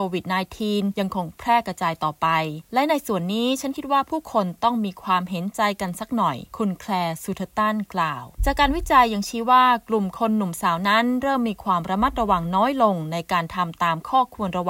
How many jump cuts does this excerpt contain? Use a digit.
2